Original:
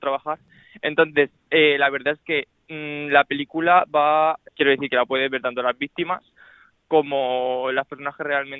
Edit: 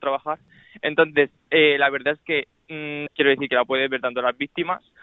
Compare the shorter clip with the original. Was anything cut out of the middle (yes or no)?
yes